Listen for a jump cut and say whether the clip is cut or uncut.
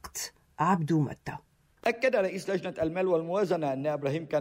uncut